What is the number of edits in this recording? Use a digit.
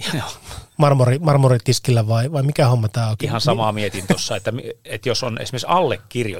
0